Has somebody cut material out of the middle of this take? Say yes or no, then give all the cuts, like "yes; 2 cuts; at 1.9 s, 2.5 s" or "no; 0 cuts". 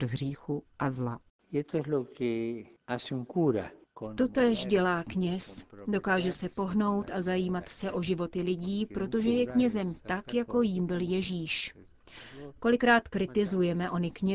no; 0 cuts